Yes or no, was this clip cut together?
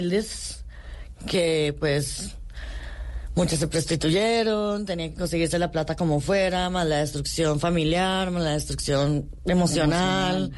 no